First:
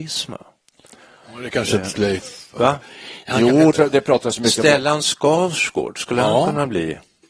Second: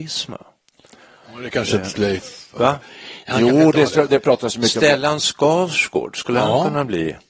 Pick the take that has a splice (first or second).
first